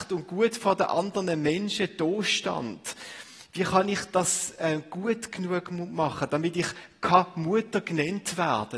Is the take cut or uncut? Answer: uncut